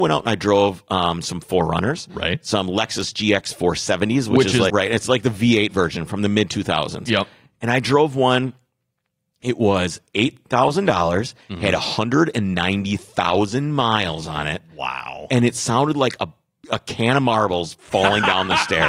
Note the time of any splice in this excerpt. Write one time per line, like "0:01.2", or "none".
0:04.7